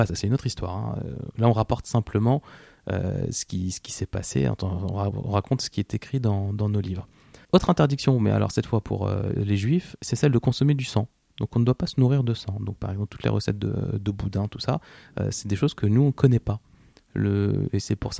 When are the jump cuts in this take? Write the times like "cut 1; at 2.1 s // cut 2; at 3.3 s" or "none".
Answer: none